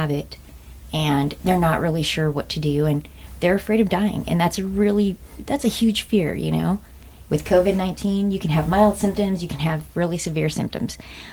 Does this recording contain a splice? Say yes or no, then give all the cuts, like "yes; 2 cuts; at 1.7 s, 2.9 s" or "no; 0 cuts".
yes; 1 cut; at 7.3 s